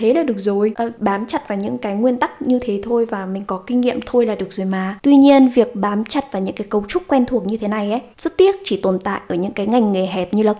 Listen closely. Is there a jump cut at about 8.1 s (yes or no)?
yes